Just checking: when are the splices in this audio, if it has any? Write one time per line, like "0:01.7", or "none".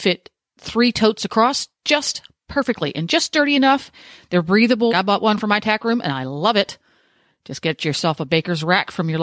0:04.9